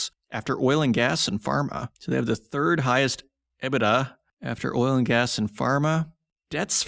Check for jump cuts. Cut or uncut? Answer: uncut